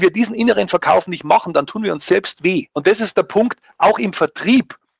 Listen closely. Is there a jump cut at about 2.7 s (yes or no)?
yes